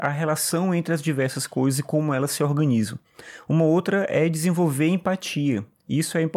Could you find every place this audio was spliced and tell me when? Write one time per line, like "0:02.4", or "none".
none